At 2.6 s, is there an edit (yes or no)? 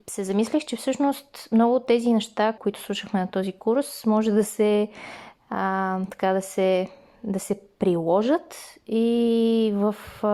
yes